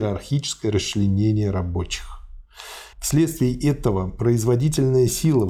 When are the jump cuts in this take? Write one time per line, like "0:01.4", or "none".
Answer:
0:02.9